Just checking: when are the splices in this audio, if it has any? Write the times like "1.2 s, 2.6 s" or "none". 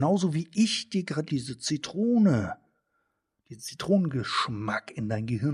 1.3 s